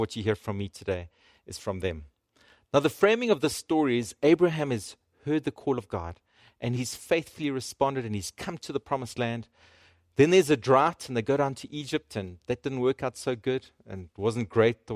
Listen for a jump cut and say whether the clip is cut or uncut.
uncut